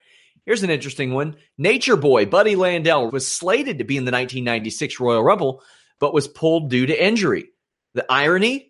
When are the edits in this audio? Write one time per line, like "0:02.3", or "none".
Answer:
0:03.1

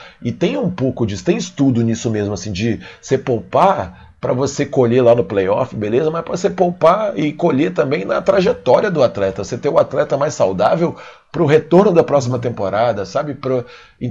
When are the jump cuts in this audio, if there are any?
none

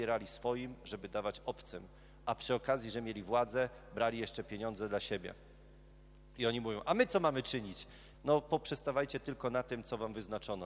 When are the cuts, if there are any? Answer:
0:08.1

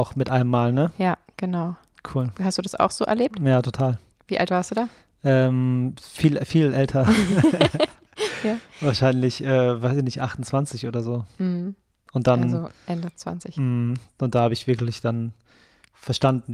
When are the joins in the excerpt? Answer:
none

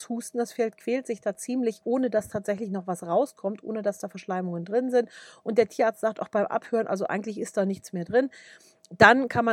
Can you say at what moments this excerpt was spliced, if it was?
none

